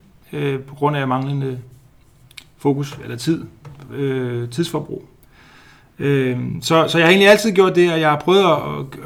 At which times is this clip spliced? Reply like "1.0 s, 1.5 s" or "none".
none